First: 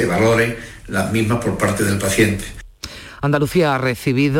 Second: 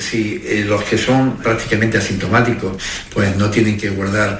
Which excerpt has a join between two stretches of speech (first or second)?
second